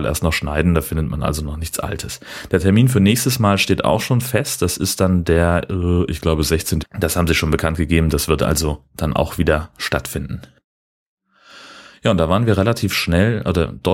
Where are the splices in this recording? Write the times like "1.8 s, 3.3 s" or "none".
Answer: 6.8 s